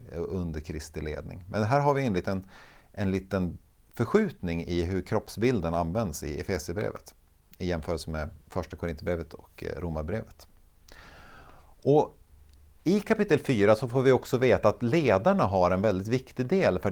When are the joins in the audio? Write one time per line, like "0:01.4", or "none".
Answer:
none